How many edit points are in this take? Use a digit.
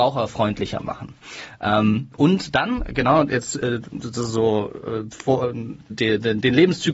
1